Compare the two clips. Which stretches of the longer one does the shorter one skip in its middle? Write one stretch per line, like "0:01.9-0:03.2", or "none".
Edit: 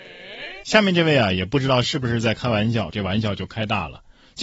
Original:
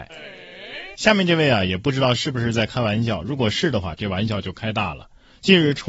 0:03.2-0:04.0